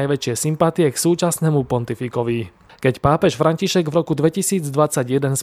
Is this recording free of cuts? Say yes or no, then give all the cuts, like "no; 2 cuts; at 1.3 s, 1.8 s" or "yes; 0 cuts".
yes; 0 cuts